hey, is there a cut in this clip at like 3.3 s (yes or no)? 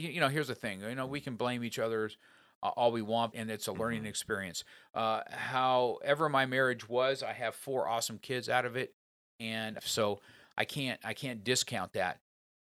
yes